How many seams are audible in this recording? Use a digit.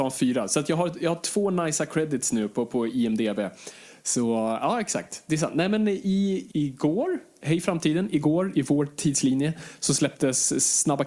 2